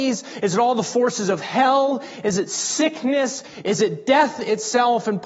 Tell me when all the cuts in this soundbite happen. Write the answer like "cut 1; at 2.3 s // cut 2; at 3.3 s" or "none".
none